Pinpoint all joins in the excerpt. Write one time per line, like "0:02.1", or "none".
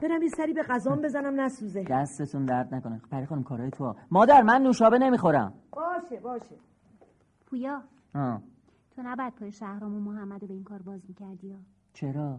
none